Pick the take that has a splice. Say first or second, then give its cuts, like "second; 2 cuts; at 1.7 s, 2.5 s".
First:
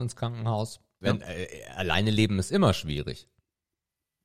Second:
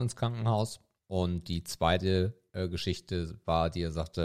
first; 1 cut; at 1.0 s